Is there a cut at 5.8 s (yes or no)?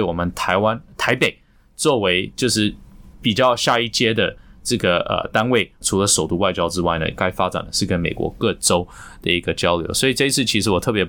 yes